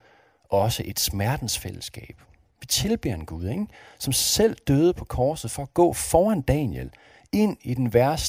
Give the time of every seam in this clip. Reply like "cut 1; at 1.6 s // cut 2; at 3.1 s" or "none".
none